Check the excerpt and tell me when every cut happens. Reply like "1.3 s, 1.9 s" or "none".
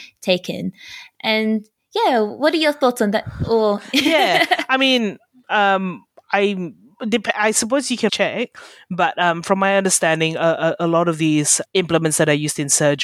8.1 s, 11.6 s